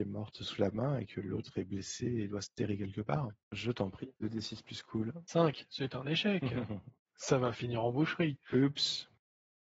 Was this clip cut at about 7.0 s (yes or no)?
yes